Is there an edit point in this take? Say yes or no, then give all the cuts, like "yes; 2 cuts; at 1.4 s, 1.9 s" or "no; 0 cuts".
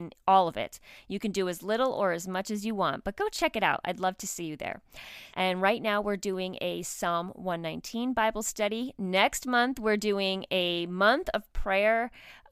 yes; 1 cut; at 5.3 s